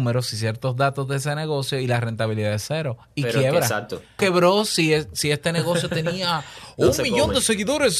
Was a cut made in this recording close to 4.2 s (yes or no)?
yes